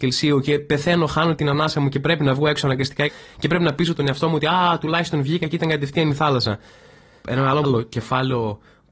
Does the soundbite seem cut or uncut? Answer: cut